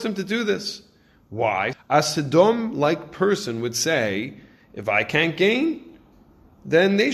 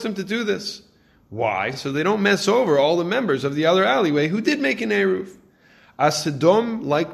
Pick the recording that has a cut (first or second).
first